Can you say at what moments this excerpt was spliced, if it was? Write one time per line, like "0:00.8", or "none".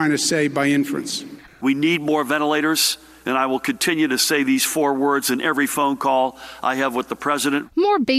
0:01.5

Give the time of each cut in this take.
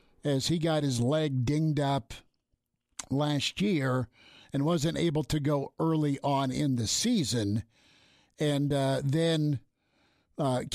none

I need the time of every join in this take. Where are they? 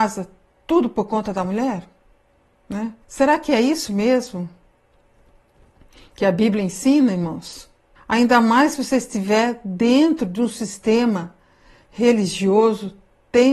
0:03.0
0:08.0

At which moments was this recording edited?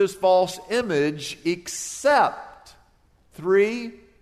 none

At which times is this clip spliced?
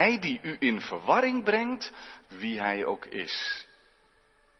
0:02.2

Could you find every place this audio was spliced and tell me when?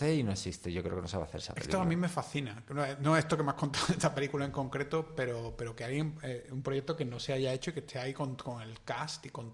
none

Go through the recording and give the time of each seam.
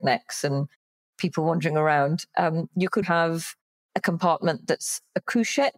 0:03.0

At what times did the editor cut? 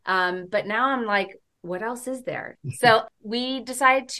0:02.6

